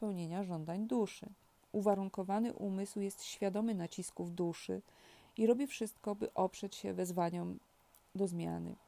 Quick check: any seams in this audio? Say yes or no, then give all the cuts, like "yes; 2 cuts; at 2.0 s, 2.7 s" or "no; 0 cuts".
yes; 1 cut; at 1.6 s